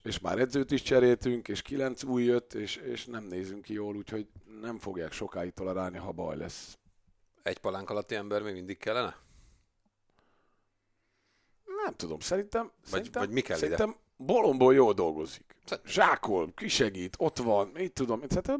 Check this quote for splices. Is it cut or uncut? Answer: uncut